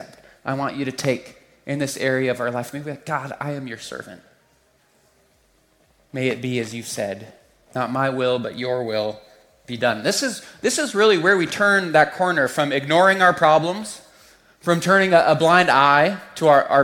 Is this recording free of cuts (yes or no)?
yes